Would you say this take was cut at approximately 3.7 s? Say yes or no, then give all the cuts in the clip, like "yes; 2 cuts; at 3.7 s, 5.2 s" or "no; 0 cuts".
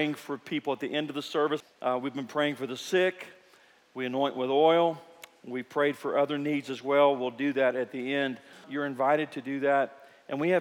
no; 2 cuts; at 1.6 s, 8.6 s